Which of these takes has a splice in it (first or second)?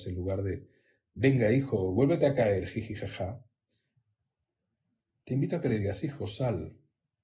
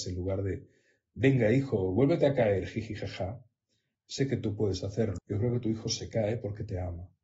second